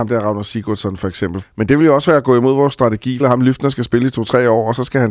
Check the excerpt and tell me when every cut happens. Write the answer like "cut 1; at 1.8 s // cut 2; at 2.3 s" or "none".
cut 1; at 1.4 s // cut 2; at 3.2 s